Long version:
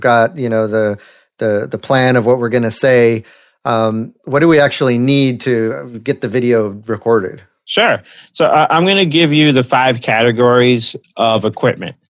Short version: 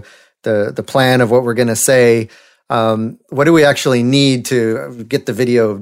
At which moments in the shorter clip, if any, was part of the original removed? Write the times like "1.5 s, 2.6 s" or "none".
none

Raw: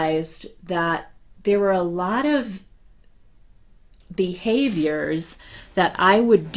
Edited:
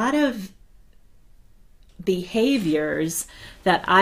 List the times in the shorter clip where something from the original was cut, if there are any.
none

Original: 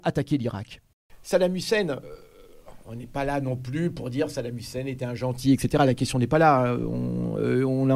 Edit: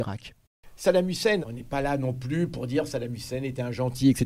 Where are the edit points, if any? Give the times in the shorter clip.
1.4 s

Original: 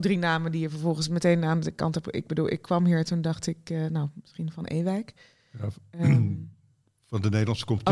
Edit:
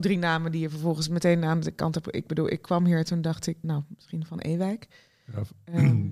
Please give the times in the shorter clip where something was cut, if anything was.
3.6 s

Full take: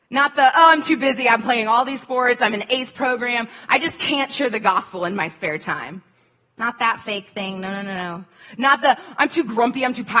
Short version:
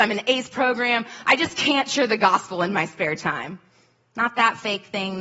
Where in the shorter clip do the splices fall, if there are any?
none

